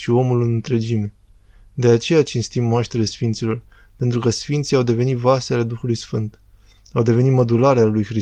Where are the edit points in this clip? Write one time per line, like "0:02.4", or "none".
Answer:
none